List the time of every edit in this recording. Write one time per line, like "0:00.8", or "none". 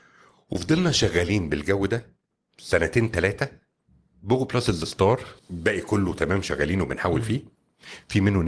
0:05.4